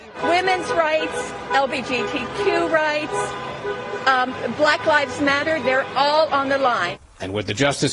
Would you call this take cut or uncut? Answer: uncut